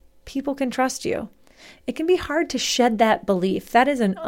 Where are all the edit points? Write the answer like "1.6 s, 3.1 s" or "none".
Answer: 1.8 s